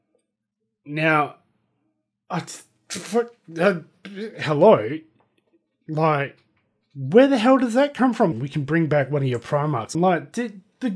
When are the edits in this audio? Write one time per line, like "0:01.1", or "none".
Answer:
0:08.3
0:09.9